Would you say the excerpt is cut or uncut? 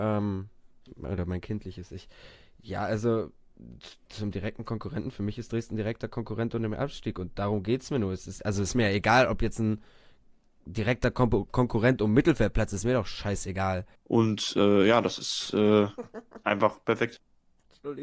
cut